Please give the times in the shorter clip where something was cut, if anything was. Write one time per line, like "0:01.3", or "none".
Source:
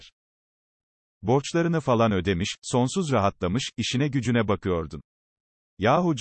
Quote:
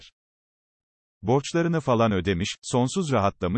none